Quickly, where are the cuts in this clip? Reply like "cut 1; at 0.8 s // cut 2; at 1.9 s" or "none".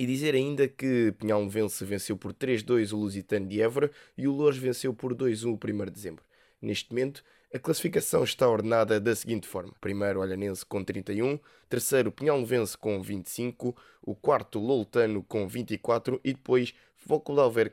cut 1; at 9.8 s // cut 2; at 11.6 s